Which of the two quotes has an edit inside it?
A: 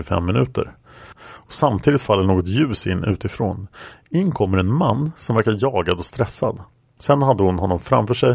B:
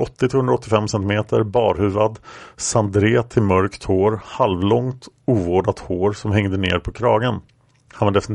A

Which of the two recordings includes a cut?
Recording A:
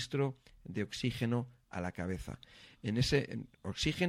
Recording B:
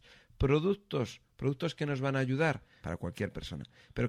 B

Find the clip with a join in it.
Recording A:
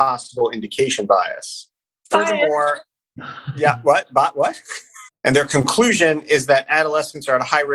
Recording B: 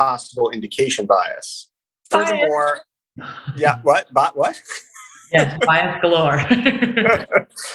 A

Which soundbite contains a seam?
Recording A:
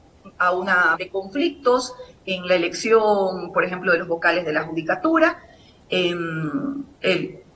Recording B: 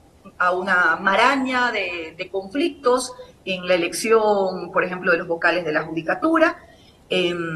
A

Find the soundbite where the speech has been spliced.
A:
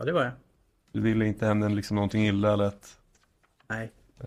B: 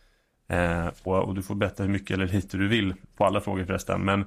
B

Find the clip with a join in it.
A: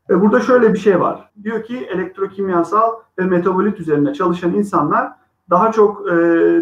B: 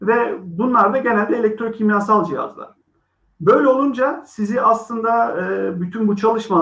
A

